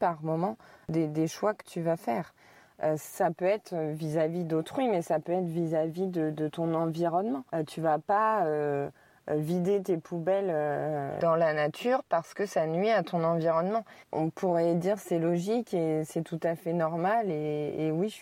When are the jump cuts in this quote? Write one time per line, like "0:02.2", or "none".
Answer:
0:07.5
0:14.0